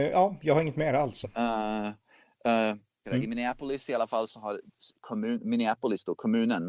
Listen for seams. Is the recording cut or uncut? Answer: cut